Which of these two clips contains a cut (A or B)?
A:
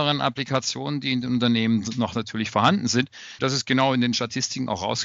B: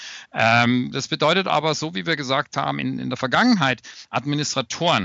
A